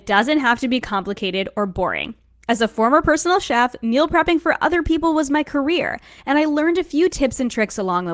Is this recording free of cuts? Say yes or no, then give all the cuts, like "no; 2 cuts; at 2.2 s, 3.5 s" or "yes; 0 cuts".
yes; 0 cuts